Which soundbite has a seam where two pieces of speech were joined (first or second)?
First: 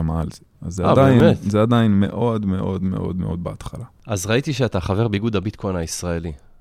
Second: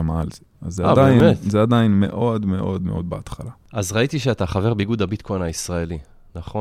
second